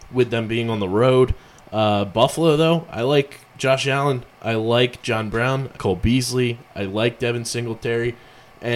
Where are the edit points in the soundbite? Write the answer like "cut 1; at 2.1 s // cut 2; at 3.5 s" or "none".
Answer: cut 1; at 5.8 s